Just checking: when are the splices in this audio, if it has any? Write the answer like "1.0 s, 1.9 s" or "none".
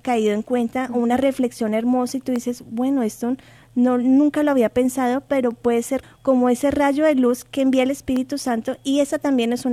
6.0 s